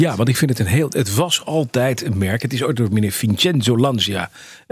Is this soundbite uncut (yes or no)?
yes